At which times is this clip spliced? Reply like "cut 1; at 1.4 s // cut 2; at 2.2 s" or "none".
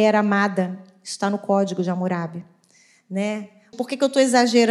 cut 1; at 3.7 s